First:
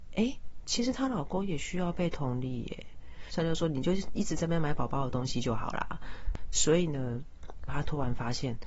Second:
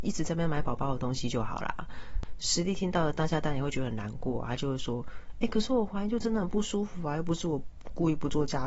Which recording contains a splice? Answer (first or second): first